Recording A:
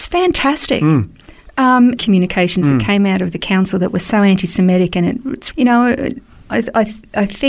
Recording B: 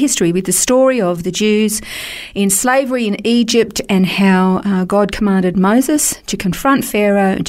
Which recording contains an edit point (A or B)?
A